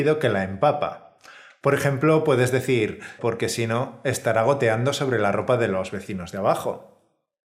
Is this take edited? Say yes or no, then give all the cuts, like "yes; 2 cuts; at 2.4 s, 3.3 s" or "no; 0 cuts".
yes; 1 cut; at 3.2 s